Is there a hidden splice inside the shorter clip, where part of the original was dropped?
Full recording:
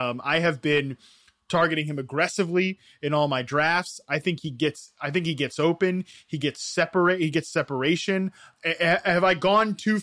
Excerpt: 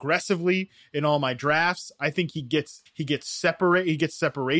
yes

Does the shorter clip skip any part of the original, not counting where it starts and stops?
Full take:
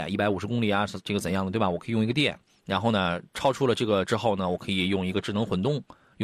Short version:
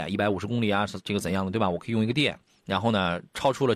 no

